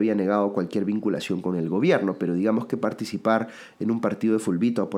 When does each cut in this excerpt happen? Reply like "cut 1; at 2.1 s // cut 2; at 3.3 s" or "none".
none